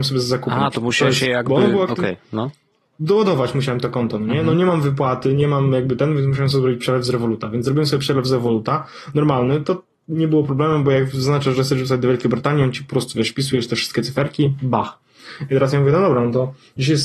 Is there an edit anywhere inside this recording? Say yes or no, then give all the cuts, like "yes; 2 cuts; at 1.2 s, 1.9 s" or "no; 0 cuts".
no; 0 cuts